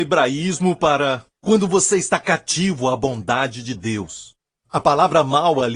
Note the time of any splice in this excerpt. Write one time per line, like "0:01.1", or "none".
0:04.6